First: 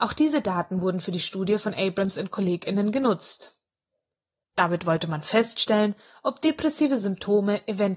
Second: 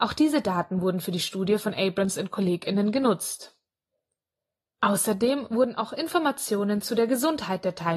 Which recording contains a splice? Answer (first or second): first